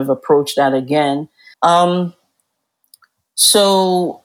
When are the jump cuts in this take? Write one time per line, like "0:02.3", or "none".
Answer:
0:01.5